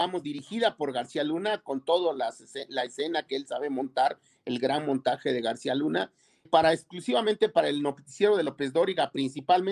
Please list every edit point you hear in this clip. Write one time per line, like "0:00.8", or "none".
0:06.4